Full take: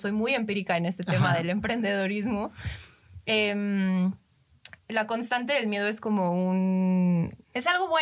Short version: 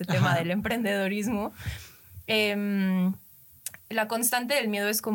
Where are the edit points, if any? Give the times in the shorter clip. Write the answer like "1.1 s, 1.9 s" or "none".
none